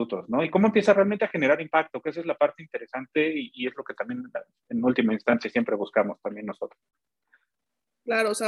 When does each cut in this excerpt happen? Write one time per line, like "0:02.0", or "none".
none